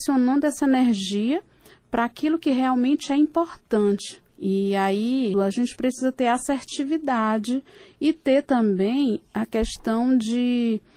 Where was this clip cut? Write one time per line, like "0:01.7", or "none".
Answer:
0:04.3
0:05.3